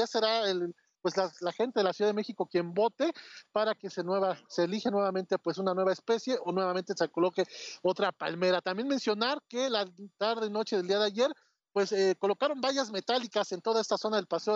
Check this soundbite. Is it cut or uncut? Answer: uncut